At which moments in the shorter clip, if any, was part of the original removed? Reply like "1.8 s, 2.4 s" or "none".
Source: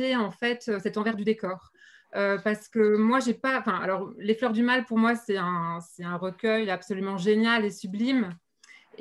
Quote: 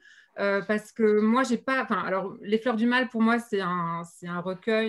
none